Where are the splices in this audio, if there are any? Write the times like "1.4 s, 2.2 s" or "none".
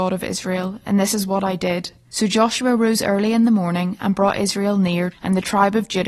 2.1 s, 5.1 s